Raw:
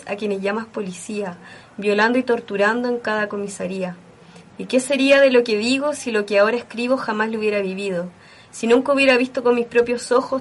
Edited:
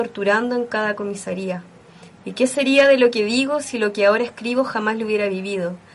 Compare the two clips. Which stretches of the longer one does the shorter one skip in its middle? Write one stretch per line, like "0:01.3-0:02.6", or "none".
none